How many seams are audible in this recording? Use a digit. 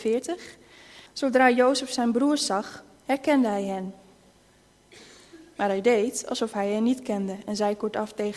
1